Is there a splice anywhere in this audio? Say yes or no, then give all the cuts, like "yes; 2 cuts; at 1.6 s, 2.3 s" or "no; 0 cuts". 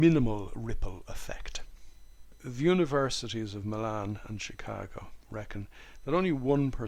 no; 0 cuts